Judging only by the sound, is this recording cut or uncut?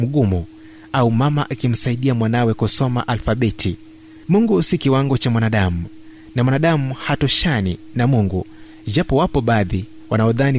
cut